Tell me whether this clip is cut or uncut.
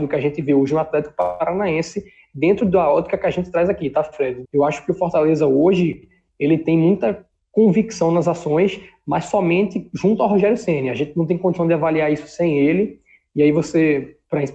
cut